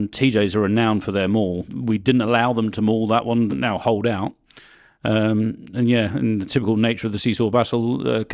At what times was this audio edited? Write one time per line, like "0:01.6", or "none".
0:01.7
0:03.5

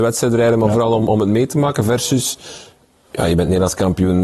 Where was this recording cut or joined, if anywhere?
none

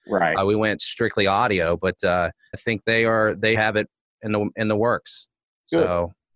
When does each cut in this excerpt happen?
0:02.5
0:03.5

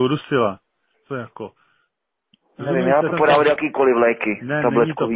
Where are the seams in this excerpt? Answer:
0:00.9
0:03.1

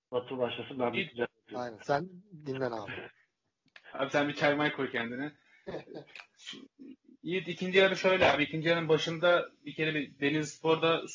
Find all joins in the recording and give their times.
none

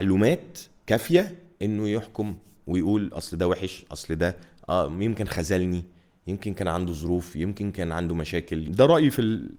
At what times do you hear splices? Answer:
none

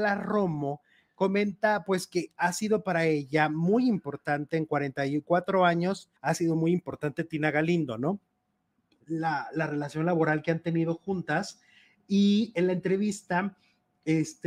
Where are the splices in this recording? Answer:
0:06.2

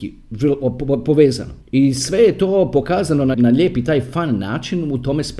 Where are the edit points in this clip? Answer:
0:01.6
0:03.3

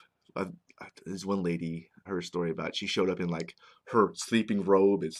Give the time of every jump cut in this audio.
0:02.1

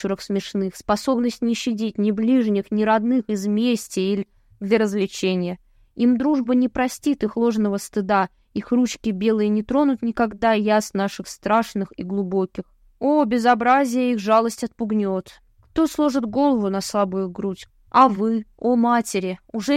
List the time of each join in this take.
0:15.5
0:17.7

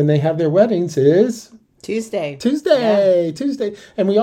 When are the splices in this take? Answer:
none

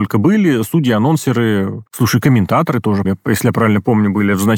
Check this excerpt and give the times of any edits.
0:01.9
0:03.0

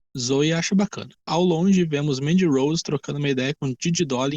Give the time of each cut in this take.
0:01.2

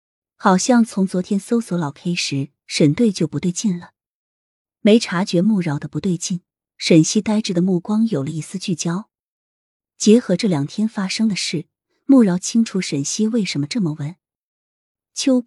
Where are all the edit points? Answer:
0:04.6

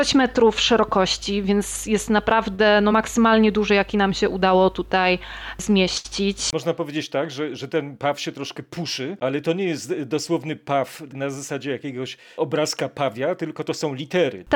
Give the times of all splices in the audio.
none

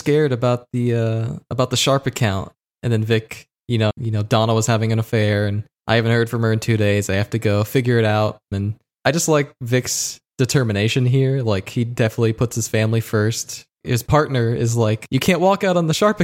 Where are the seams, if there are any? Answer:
0:03.9
0:08.5

